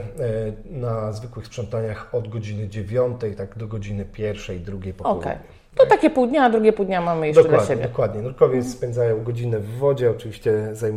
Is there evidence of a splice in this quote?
no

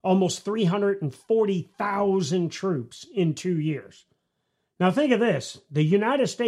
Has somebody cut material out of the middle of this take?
no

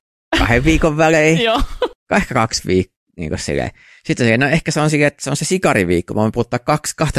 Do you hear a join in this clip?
no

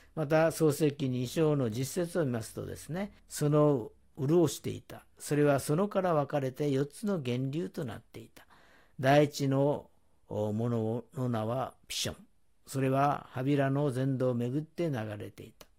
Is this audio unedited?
no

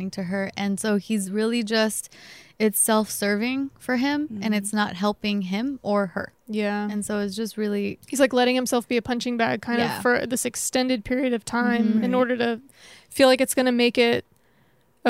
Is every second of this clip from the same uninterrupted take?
yes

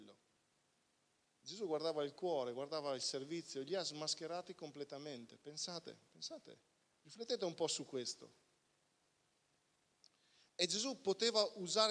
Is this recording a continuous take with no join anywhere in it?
yes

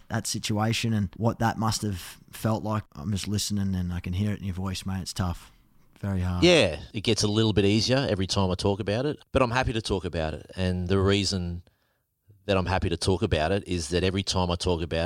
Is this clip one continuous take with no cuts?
yes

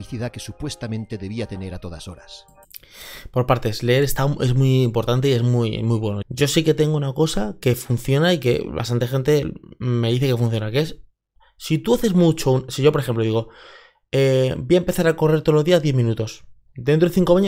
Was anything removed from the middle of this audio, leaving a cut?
yes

